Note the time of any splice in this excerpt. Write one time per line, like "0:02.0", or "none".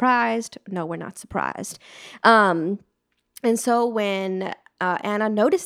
none